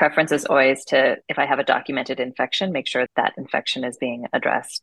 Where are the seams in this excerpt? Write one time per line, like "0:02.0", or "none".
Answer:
0:01.2
0:03.1

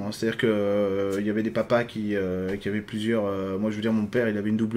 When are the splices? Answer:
none

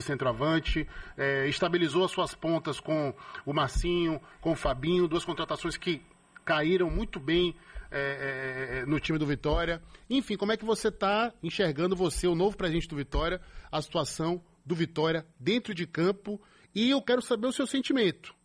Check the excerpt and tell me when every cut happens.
none

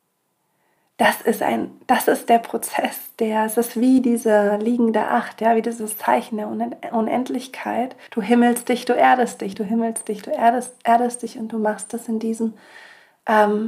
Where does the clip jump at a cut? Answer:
0:08.1

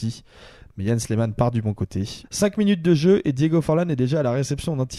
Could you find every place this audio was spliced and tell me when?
0:02.2

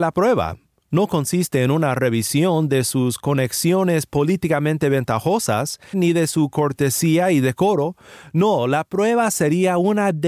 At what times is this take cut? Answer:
0:05.9

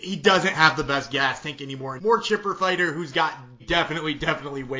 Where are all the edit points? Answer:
0:02.0
0:03.6

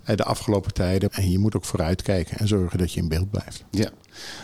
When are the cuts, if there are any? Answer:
0:01.1

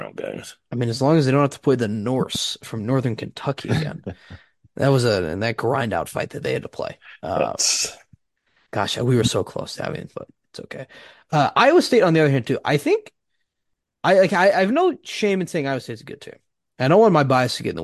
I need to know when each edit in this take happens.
0:10.1

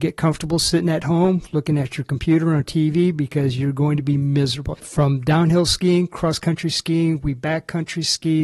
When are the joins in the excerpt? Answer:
0:04.7

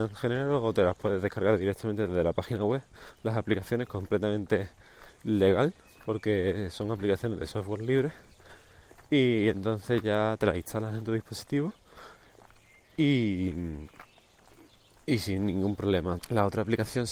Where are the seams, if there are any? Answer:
0:16.2

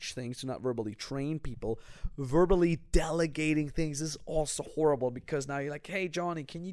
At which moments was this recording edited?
none

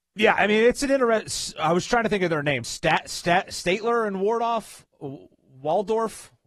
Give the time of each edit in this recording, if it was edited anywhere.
none

